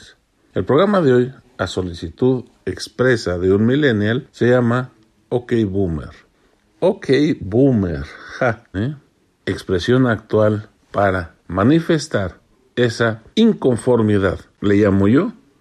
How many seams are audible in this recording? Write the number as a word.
three